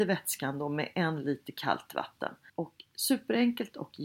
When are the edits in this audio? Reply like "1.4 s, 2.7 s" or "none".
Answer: 2.5 s